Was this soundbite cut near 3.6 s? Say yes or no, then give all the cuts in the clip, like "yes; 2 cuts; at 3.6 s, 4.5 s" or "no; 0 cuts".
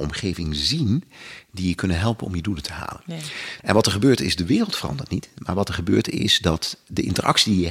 yes; 1 cut; at 3.6 s